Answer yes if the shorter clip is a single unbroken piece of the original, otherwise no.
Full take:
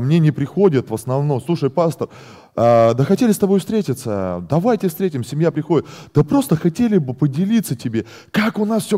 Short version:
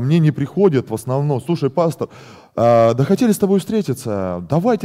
yes